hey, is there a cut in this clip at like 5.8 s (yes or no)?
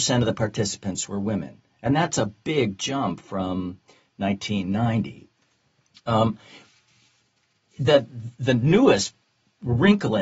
no